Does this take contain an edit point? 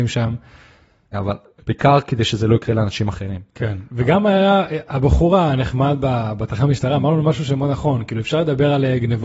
yes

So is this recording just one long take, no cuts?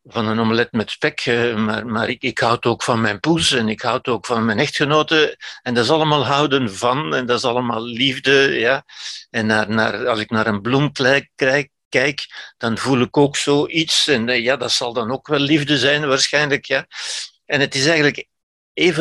yes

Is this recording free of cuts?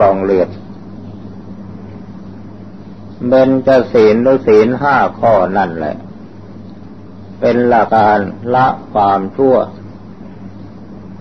no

